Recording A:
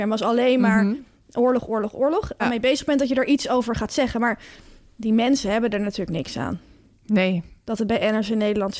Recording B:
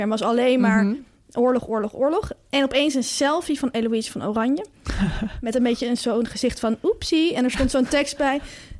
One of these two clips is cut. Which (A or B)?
A